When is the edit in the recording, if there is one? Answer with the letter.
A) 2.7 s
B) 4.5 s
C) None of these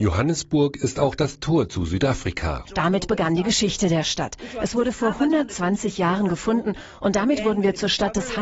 A